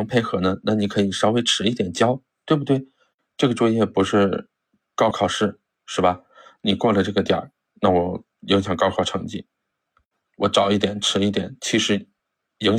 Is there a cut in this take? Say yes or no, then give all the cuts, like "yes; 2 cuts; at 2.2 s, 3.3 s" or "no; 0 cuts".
yes; 1 cut; at 5.1 s